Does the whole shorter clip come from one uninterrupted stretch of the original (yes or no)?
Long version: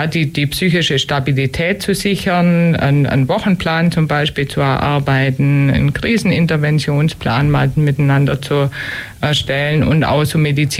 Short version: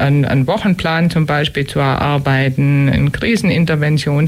yes